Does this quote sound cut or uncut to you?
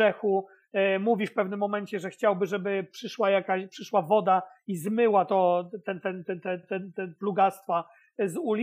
uncut